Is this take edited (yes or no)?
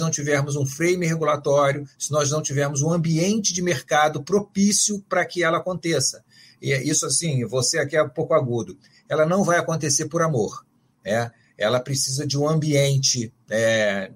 no